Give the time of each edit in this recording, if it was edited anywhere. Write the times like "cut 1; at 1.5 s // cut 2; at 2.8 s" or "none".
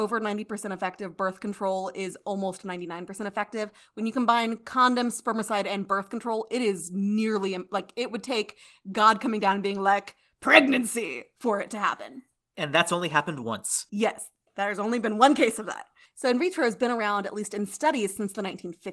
cut 1; at 13.9 s // cut 2; at 16.1 s